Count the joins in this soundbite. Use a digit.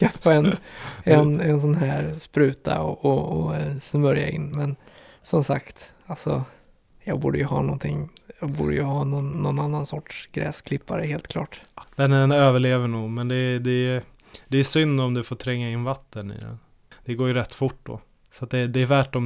0